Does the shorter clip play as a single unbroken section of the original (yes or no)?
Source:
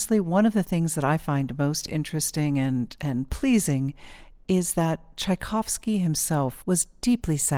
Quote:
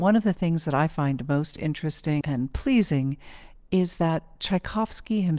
no